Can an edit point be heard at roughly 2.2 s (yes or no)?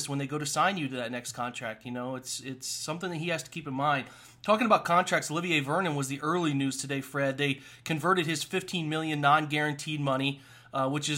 no